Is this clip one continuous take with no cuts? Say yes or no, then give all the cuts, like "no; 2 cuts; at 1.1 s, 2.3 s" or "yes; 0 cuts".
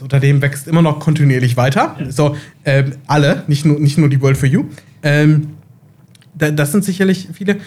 yes; 0 cuts